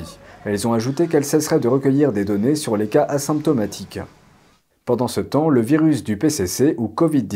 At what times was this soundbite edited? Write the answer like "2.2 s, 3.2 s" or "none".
none